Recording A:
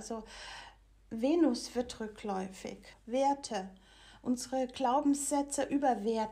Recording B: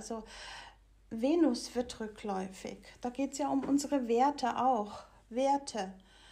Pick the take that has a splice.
A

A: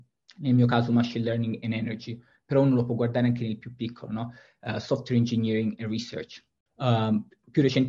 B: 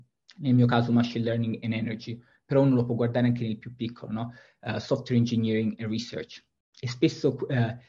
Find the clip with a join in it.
A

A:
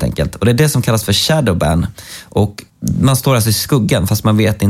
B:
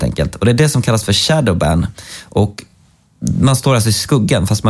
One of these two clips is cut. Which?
A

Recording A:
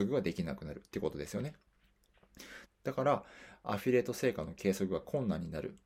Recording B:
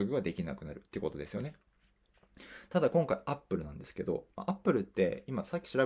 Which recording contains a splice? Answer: A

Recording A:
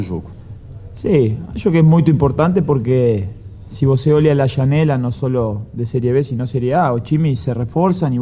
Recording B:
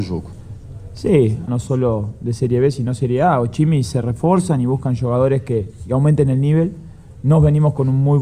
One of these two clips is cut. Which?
B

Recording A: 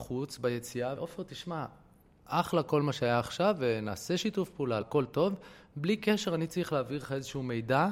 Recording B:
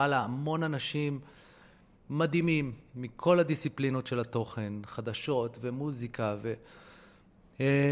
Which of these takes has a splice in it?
A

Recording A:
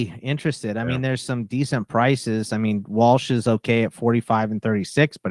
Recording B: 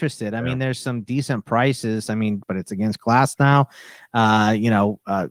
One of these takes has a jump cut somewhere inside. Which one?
B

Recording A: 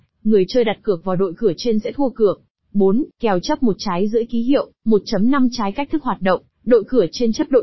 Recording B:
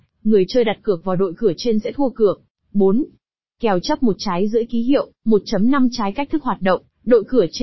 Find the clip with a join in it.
A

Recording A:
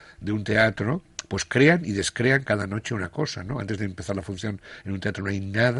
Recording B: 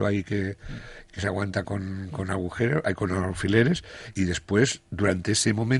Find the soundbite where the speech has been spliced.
B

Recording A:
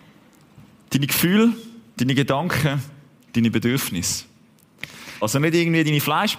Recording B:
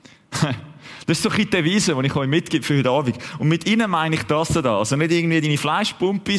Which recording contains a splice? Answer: A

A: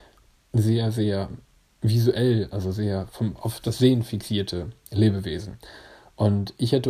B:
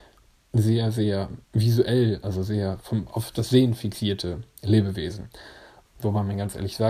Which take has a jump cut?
B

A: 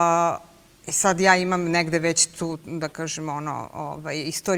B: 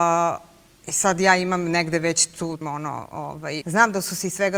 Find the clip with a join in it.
B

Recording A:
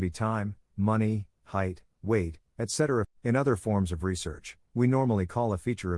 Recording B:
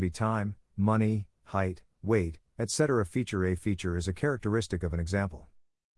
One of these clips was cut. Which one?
A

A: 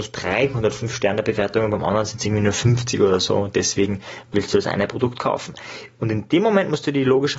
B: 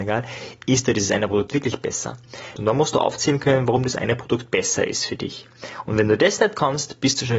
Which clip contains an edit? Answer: B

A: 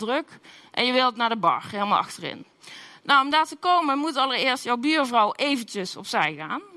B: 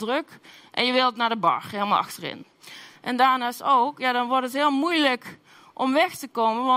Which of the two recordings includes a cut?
B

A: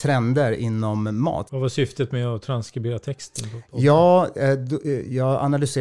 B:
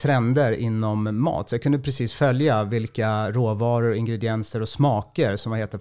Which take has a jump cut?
A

